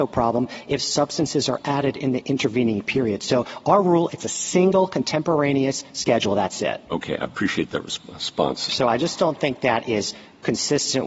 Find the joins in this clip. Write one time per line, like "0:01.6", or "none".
0:08.7